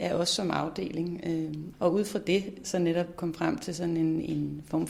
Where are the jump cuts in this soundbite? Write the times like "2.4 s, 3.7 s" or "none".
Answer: 1.7 s